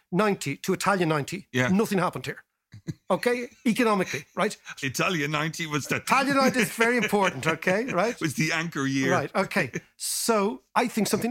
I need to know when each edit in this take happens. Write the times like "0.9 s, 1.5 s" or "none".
4.8 s